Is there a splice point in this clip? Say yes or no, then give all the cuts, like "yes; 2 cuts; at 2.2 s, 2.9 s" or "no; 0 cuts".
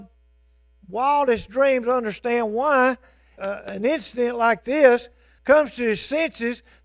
yes; 2 cuts; at 3.4 s, 5.4 s